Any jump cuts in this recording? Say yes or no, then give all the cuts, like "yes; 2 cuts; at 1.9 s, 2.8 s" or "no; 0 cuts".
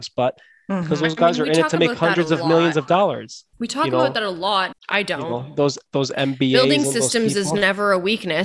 yes; 2 cuts; at 3.5 s, 4.7 s